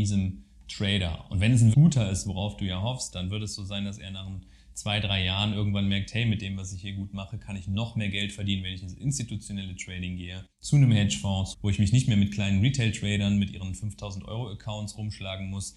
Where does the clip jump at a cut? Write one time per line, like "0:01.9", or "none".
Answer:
0:01.7
0:10.5
0:11.5